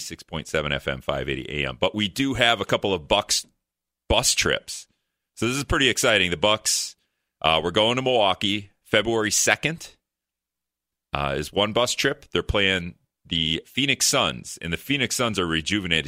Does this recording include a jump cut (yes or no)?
no